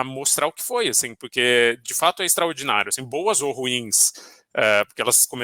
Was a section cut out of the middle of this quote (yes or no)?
no